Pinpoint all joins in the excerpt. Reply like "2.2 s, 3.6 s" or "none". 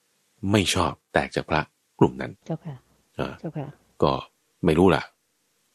2.4 s